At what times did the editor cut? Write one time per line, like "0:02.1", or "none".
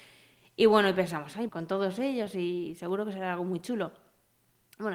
0:01.5